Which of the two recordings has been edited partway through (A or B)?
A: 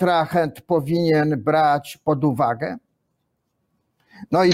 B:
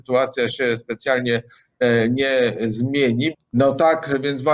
B